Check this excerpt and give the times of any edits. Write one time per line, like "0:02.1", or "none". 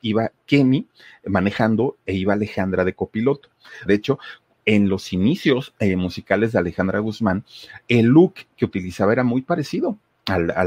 0:03.9